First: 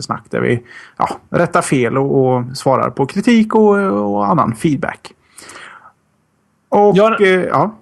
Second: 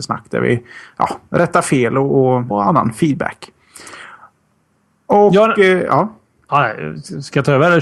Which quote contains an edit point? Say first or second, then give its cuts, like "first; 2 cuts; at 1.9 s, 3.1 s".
second; 1 cut; at 2.5 s